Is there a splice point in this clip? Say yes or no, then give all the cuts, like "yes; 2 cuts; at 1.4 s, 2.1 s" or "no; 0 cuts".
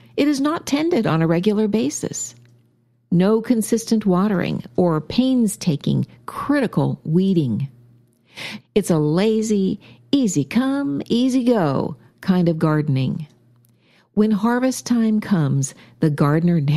yes; 1 cut; at 8.6 s